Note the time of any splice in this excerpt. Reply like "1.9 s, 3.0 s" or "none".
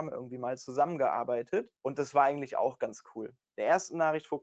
1.7 s, 3.4 s